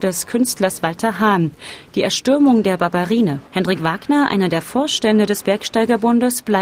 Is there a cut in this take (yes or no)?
yes